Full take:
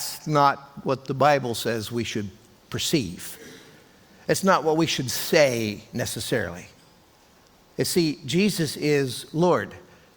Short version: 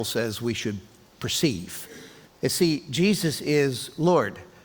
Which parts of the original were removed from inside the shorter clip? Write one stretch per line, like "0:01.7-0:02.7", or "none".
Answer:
0:03.7-0:07.6